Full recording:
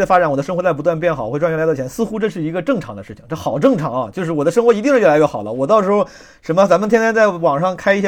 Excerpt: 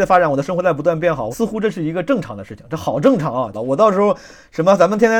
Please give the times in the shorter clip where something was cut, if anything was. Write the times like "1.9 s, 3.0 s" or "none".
1.3 s, 3.5 s